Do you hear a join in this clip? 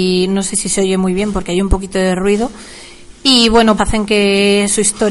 yes; 1 cut; at 3.8 s

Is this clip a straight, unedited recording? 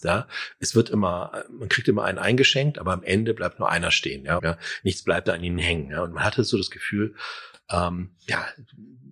no; 1 cut; at 4.4 s

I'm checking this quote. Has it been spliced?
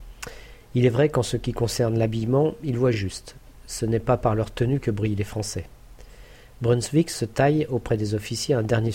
no; 0 cuts

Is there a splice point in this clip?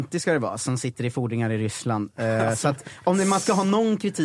no; 0 cuts

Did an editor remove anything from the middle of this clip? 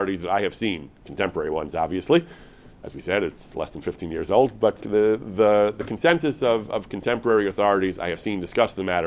yes; 1 cut; at 4.8 s

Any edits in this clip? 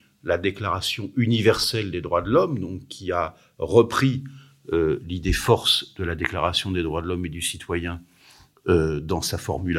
no; 0 cuts

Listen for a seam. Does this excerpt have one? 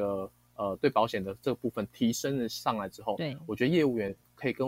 yes; 1 cut; at 1.9 s

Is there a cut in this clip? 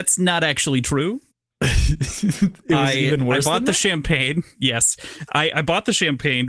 no; 0 cuts

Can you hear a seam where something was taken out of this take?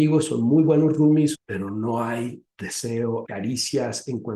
yes; 2 cuts; at 1.3 s, 3.2 s

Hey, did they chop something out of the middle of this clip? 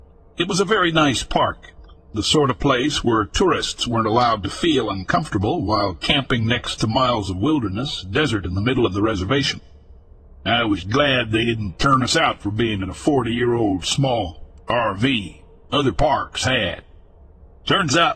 yes; 2 cuts; at 2.1 s, 10.8 s

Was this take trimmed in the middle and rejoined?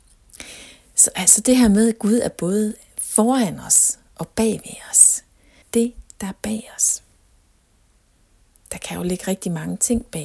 yes; 1 cut; at 5.6 s

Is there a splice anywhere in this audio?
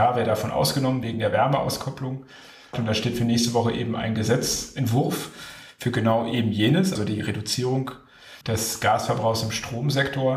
yes; 3 cuts; at 2.7 s, 7.0 s, 8.4 s

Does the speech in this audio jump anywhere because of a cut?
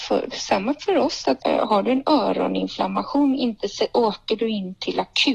yes; 1 cut; at 1.4 s

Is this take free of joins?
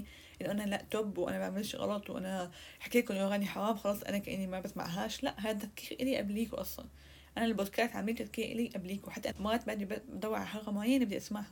no; 1 cut; at 9.3 s

